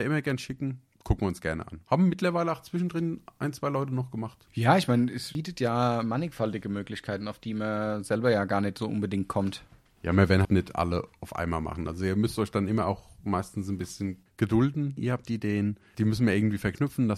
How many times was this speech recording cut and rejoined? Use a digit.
2